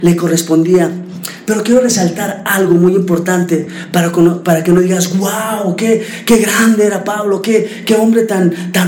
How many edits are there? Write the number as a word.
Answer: zero